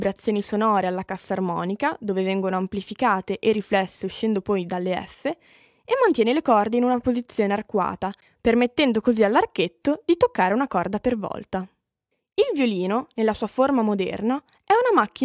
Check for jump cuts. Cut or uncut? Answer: uncut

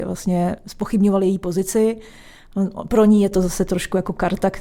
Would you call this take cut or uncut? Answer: uncut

